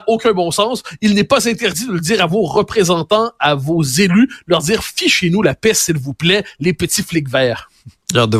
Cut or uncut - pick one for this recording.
uncut